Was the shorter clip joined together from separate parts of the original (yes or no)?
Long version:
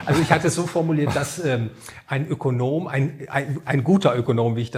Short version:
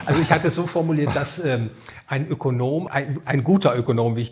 yes